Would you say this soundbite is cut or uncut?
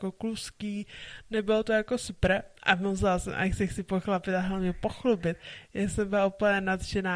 uncut